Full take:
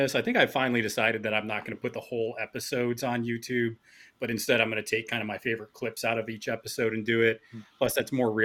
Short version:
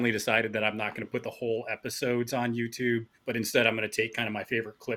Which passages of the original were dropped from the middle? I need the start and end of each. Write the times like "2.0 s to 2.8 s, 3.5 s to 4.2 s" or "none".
3.8 s to 4.1 s